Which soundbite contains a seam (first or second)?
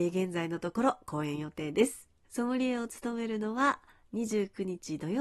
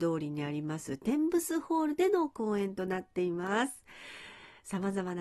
first